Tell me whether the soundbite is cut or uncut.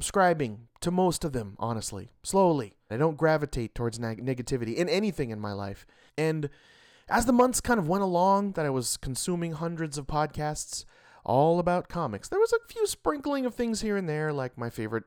cut